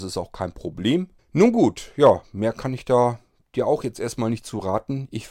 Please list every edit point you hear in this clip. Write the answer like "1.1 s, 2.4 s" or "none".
1.2 s